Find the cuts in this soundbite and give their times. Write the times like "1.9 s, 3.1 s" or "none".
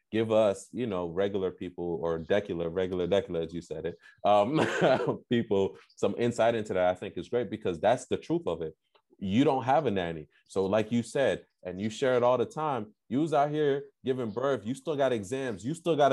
none